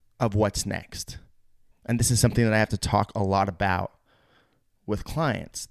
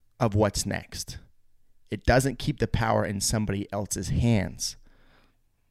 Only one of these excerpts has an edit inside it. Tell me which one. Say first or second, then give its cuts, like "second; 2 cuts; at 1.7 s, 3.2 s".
first; 1 cut; at 1.7 s